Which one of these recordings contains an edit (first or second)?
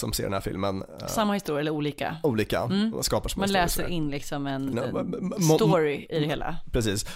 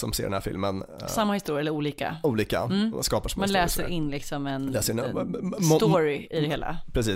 first